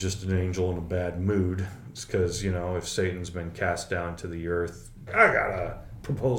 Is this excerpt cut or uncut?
cut